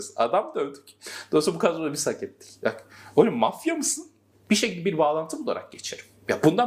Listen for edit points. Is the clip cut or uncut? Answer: cut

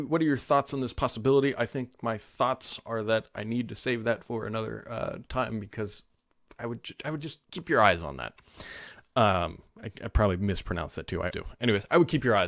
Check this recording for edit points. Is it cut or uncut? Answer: cut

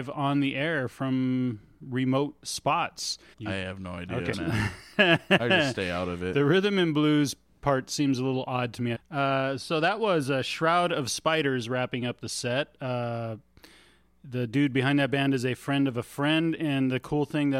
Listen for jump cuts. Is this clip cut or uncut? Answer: cut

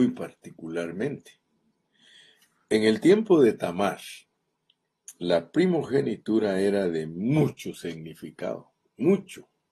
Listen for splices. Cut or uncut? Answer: uncut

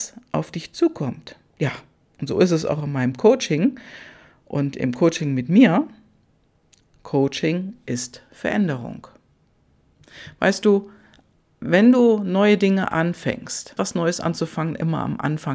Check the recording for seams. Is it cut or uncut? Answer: cut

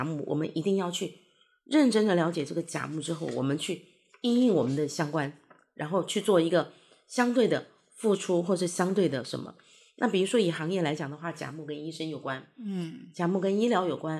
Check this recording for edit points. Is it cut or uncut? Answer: uncut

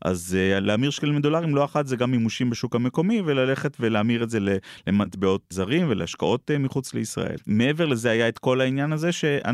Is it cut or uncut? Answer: cut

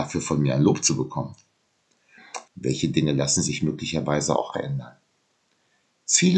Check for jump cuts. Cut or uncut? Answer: cut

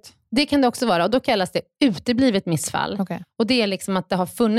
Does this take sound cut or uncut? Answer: uncut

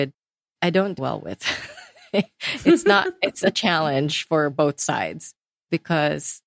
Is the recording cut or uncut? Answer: cut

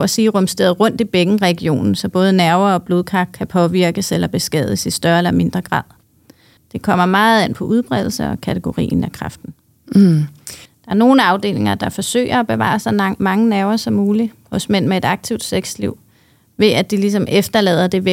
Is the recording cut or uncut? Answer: cut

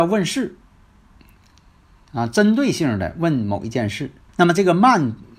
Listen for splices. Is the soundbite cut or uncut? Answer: cut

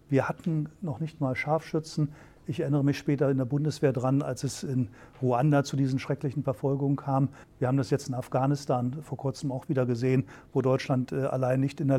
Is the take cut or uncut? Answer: cut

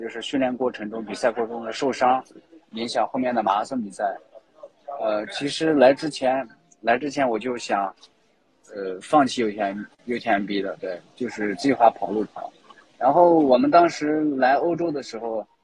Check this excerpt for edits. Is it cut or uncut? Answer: uncut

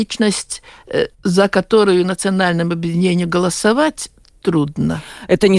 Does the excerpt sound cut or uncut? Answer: cut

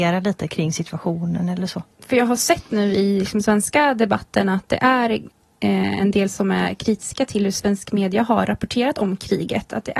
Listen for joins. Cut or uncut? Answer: uncut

